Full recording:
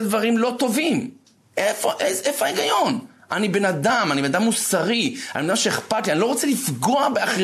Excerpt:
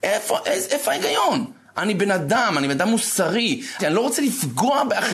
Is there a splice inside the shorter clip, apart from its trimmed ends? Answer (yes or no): yes